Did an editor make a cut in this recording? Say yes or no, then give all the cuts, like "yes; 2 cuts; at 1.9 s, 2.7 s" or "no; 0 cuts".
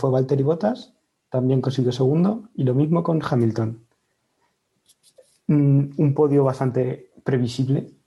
no; 0 cuts